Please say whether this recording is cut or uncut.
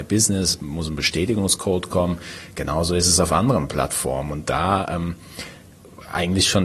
uncut